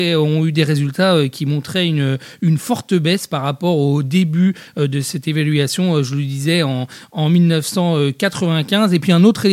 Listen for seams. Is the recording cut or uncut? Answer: uncut